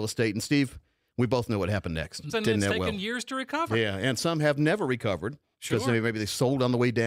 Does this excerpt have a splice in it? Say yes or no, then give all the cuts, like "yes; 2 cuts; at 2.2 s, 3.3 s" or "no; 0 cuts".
yes; 1 cut; at 2.3 s